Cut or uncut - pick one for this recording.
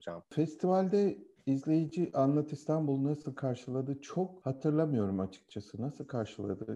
uncut